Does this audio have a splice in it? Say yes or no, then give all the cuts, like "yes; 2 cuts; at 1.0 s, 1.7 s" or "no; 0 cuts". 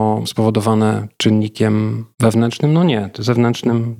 yes; 1 cut; at 2.1 s